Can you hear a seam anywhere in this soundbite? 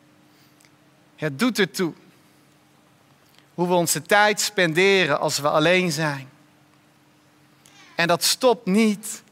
no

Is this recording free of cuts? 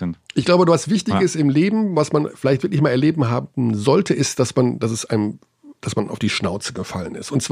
yes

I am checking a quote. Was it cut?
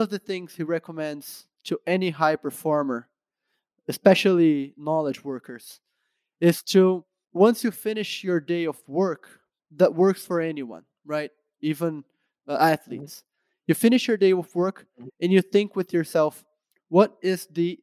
no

